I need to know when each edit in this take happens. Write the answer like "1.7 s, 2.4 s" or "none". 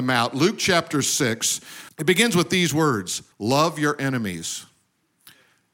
1.9 s, 3.3 s